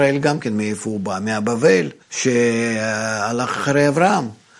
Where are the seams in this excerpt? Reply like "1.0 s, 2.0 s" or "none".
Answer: 2.0 s